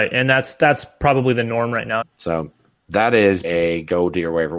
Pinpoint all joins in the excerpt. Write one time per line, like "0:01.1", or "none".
0:02.0
0:03.4